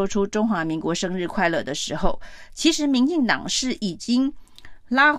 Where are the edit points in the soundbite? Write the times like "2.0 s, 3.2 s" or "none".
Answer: none